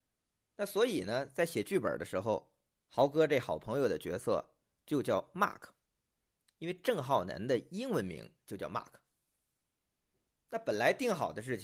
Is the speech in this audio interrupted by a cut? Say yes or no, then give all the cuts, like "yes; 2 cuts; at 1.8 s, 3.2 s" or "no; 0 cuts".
no; 0 cuts